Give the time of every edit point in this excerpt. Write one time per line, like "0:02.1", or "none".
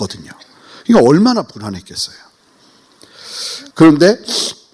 0:03.7